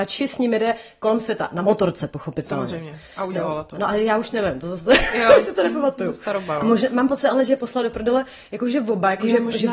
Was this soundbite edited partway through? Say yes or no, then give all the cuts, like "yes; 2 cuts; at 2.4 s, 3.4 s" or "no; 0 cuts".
no; 0 cuts